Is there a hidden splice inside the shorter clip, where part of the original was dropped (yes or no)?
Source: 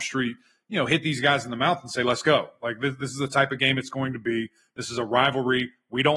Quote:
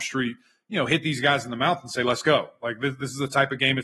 no